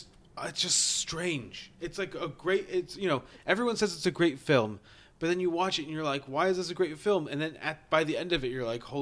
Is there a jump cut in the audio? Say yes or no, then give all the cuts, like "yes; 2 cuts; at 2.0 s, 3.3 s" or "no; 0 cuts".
no; 0 cuts